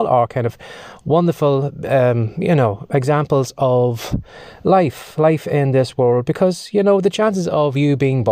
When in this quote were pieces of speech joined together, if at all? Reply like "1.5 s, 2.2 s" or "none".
none